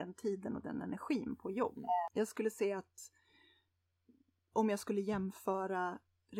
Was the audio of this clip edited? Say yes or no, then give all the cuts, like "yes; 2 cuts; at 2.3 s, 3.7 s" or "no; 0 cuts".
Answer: yes; 1 cut; at 2.1 s